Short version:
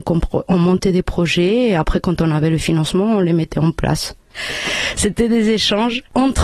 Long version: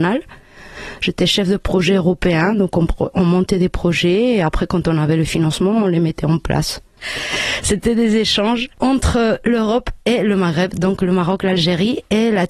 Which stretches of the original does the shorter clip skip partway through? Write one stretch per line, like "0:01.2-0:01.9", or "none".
none